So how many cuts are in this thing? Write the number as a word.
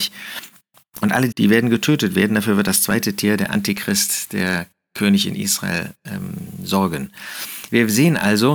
one